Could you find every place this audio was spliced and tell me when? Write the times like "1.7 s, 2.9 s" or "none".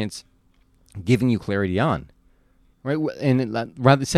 2.7 s

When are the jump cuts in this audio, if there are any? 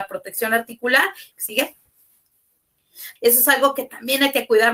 1.3 s, 3.2 s

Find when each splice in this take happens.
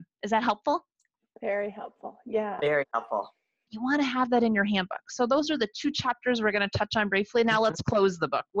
3.7 s

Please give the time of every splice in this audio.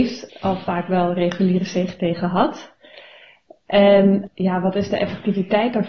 none

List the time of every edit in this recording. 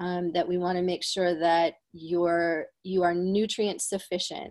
none

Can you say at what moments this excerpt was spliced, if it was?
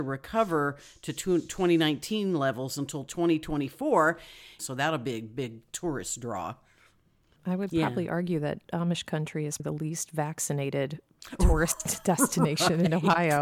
4.6 s, 7.4 s, 9.6 s

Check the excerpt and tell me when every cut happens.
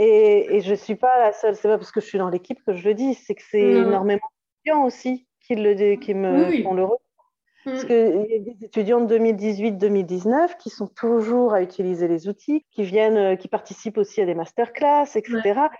12.6 s

